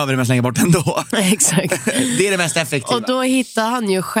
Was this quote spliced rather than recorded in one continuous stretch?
no; 0 cuts

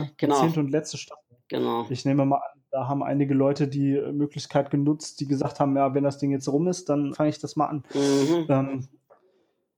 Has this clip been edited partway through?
yes; 1 cut; at 7.1 s

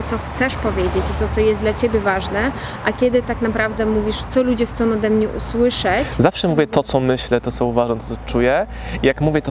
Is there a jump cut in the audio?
no; 0 cuts

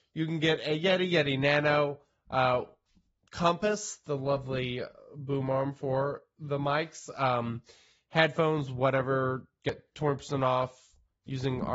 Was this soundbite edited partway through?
no; 0 cuts

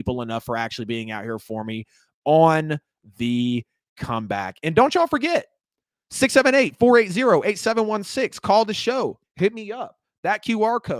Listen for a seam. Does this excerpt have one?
yes; 1 cut; at 9.2 s

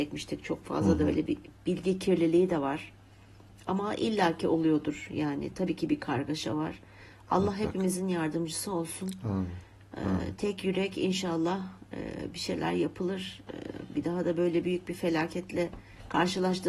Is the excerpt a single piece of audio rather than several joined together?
no; 1 cut; at 1.3 s

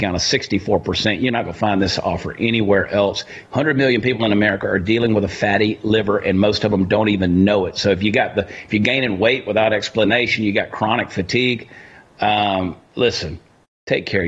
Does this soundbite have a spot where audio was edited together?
yes; 1 cut; at 3.4 s

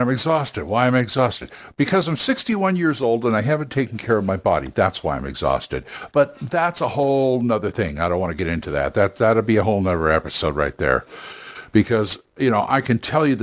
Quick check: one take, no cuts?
yes; 0 cuts

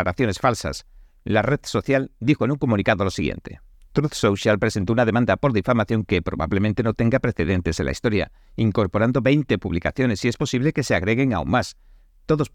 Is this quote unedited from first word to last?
yes; 0 cuts

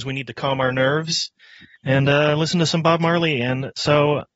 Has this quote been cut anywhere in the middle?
no; 0 cuts

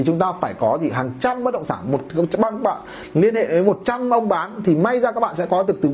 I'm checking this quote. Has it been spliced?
no; 0 cuts

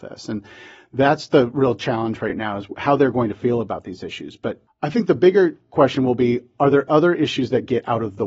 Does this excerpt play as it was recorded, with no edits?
yes; 0 cuts

